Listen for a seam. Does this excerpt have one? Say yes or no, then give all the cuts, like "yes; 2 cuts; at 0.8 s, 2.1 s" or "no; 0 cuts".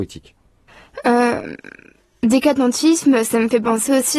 no; 0 cuts